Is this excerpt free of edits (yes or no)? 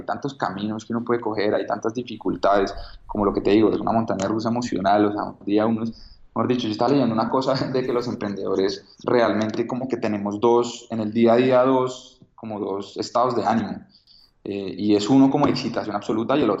no